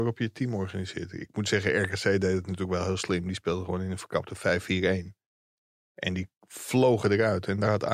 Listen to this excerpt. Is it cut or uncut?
uncut